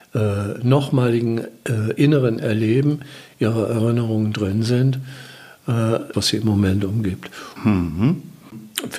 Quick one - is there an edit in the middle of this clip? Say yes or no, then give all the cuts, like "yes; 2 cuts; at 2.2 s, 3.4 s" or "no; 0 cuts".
yes; 2 cuts; at 6.1 s, 7.6 s